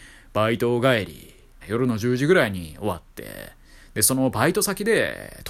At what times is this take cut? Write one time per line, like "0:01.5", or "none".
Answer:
0:01.6